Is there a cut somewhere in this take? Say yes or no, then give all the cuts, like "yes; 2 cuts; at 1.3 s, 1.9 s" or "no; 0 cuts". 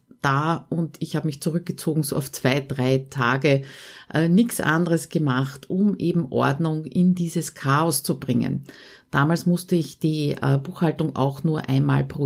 no; 0 cuts